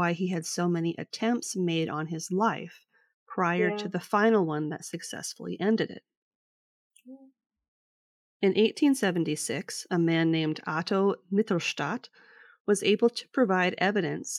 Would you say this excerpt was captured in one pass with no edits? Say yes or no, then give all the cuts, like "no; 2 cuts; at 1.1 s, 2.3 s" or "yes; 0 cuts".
yes; 0 cuts